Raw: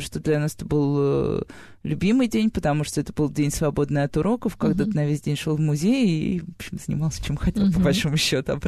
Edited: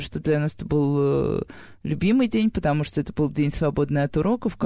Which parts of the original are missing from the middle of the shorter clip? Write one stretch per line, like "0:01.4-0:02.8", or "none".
none